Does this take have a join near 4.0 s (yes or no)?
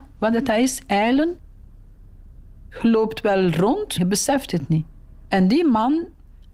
yes